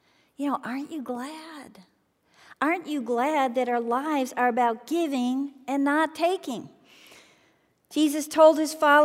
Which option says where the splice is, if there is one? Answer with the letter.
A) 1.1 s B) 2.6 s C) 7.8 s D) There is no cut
D